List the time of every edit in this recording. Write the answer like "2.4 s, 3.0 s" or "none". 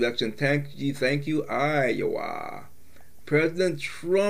3.2 s